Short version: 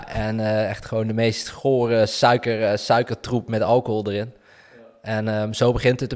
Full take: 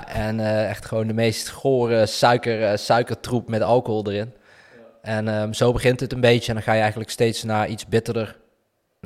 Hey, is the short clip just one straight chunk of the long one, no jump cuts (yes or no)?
yes